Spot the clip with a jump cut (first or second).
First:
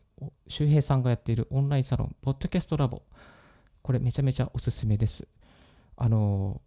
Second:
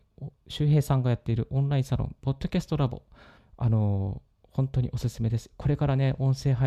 second